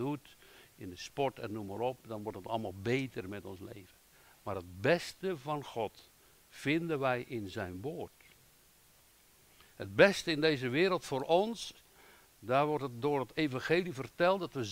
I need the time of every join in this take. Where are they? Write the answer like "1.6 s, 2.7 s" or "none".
9.7 s